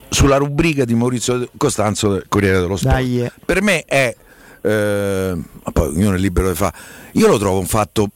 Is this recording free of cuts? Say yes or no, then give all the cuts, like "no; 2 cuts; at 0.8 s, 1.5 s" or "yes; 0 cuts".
yes; 0 cuts